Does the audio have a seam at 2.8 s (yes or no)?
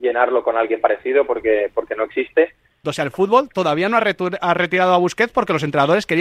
yes